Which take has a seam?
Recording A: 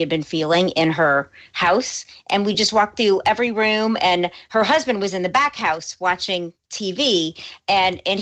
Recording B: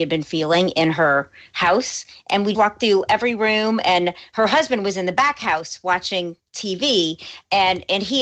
B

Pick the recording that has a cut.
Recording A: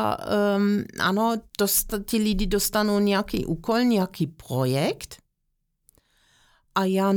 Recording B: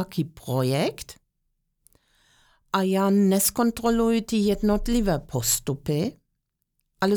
A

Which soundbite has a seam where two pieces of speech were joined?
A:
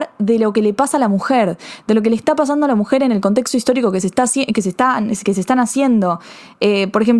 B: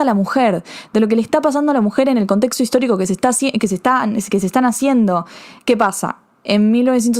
B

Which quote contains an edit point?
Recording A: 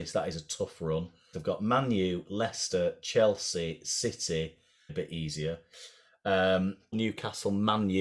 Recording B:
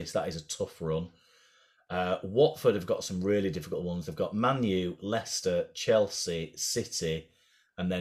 A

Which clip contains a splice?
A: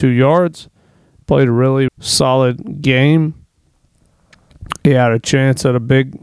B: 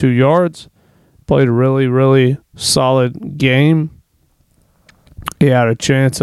A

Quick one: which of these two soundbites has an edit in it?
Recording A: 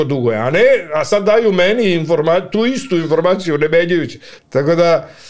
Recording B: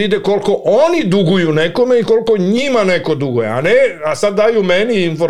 A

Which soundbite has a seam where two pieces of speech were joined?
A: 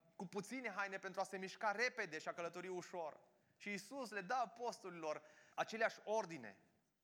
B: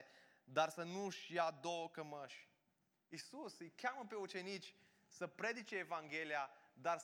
A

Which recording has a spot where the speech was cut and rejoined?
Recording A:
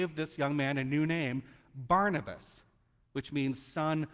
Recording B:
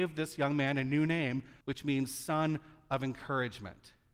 B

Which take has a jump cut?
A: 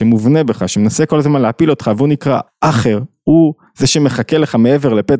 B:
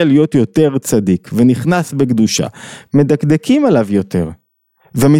A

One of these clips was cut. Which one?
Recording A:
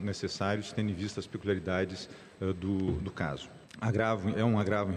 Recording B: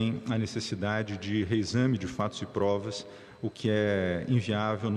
A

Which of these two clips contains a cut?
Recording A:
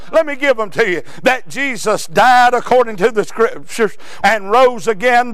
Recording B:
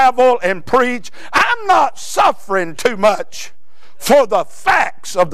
A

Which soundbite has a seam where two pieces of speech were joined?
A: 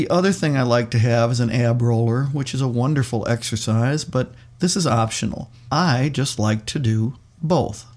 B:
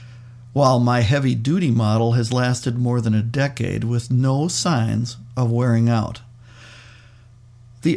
A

